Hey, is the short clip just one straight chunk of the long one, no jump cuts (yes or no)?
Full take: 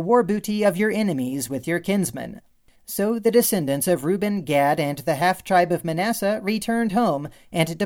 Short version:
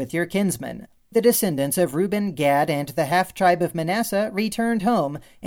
no